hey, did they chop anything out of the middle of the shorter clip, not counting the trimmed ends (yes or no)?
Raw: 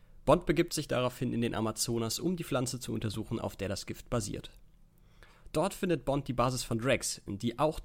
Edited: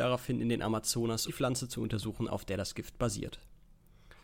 yes